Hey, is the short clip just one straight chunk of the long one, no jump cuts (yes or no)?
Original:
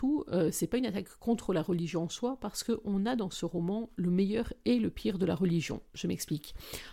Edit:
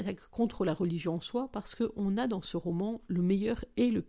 yes